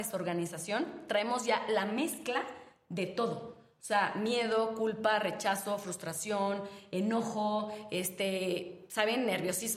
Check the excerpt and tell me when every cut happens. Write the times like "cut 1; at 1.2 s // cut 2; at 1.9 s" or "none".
none

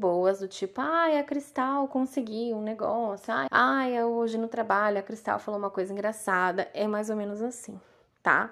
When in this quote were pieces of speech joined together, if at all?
cut 1; at 3.5 s

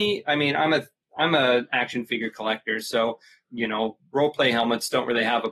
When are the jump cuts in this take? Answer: none

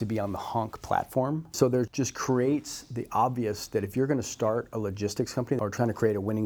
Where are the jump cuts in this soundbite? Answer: cut 1; at 1.5 s

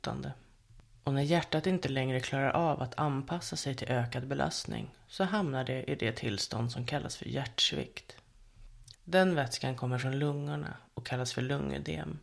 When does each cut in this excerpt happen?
cut 1; at 0.9 s // cut 2; at 8.9 s

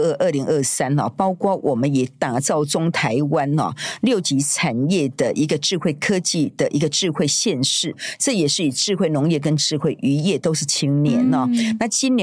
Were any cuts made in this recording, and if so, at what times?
none

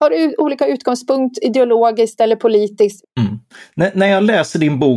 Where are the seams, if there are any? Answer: cut 1; at 3.0 s

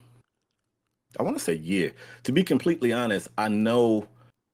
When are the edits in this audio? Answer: cut 1; at 1.5 s

